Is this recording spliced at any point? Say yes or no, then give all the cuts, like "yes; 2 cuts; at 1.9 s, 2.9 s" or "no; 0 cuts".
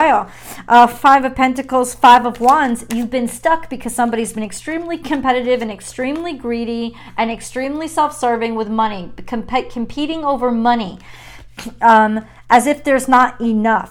no; 0 cuts